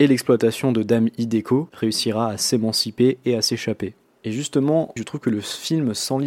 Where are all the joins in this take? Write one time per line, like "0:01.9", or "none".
0:01.7
0:05.0